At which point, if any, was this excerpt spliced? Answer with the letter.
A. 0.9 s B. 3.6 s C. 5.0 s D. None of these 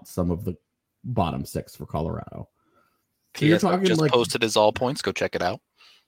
D